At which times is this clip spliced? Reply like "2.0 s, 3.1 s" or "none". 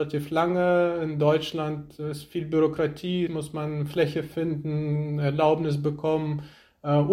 3.3 s